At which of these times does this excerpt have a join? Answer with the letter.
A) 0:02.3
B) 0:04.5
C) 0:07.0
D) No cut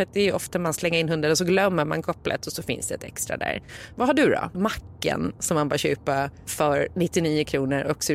B